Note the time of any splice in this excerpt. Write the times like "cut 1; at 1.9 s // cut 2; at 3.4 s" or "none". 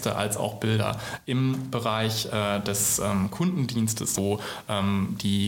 cut 1; at 4.2 s